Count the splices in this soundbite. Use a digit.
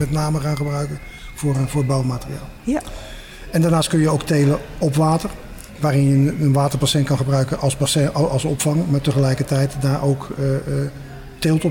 0